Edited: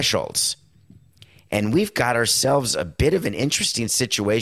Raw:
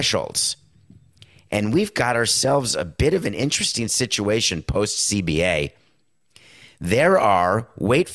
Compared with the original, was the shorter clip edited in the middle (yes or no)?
no